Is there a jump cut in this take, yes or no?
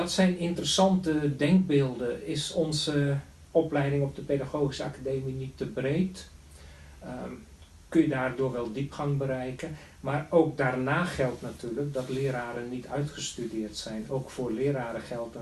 no